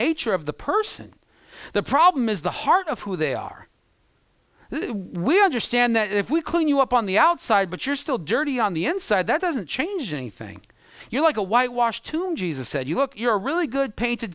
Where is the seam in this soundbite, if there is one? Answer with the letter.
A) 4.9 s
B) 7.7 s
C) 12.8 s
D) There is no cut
D